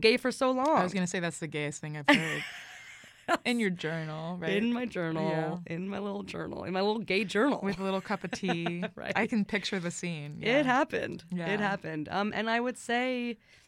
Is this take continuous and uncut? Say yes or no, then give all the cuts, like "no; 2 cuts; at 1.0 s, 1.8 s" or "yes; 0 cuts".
no; 1 cut; at 3.4 s